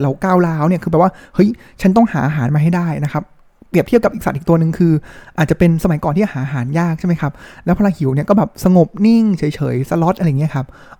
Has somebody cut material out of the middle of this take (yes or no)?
no